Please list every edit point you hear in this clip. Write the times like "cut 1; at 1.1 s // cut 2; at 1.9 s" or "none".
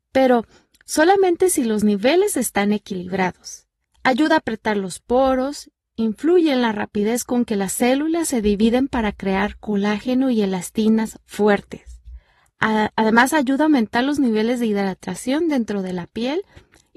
cut 1; at 3.8 s